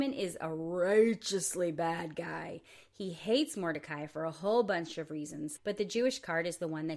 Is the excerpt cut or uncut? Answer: cut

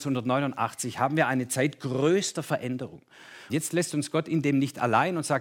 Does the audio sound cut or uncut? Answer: cut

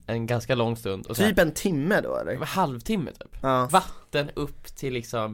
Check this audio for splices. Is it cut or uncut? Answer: cut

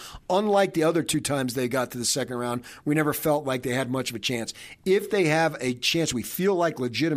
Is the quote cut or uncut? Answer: uncut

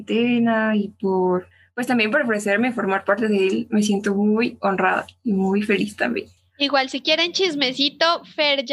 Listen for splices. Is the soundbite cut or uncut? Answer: uncut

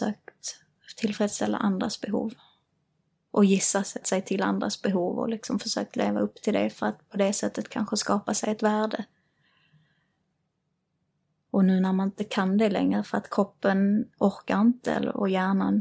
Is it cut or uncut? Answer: cut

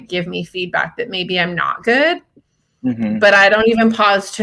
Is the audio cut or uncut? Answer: uncut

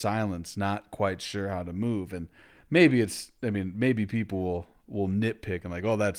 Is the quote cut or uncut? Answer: uncut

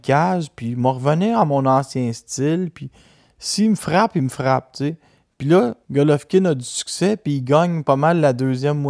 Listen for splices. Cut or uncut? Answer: cut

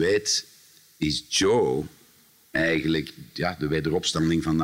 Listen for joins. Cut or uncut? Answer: uncut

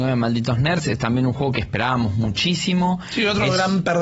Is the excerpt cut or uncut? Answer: uncut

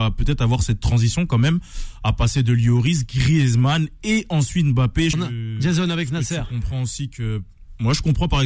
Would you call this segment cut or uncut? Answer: cut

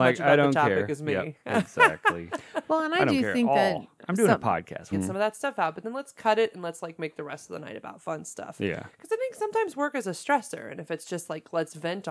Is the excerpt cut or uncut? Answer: cut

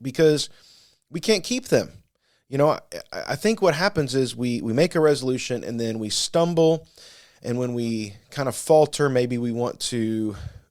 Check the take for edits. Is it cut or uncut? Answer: uncut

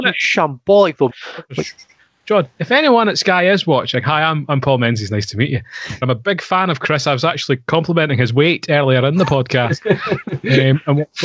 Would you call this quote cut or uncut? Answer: cut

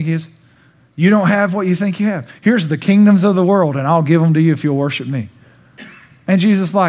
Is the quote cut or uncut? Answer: uncut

